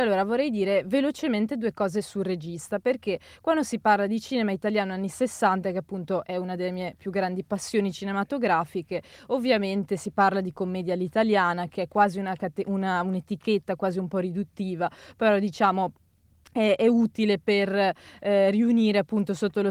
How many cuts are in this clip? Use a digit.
0